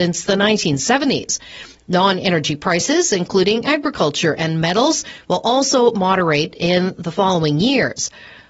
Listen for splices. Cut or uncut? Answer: cut